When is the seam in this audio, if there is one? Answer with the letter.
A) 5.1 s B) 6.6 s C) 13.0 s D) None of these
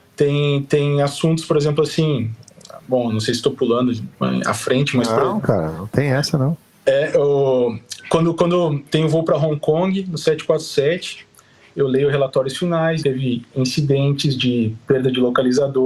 C